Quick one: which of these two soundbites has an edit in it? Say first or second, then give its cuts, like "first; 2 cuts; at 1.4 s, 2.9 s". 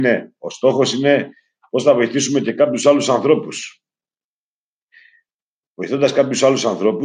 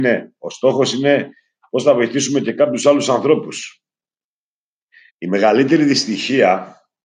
second; 1 cut; at 5.1 s